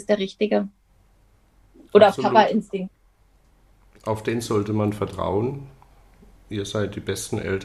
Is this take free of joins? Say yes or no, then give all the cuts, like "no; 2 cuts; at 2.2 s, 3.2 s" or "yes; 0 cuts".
yes; 0 cuts